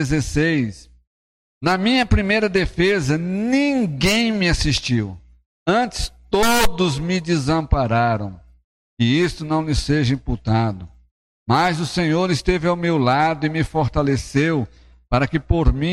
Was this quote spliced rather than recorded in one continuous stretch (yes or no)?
no